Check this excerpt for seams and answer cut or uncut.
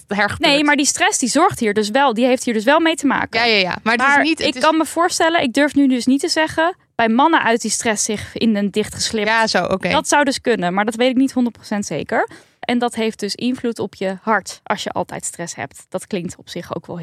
cut